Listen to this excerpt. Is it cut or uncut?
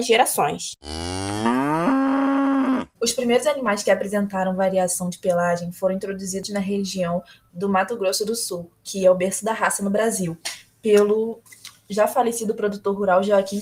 cut